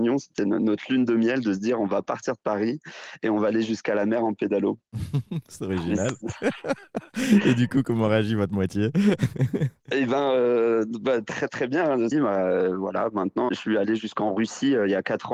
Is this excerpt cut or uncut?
cut